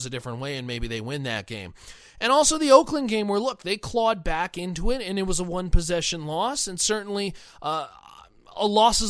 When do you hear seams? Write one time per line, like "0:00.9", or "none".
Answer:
none